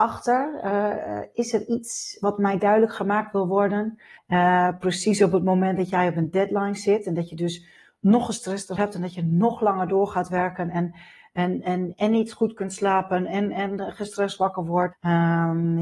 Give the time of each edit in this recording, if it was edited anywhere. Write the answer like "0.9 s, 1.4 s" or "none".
4.2 s, 14.9 s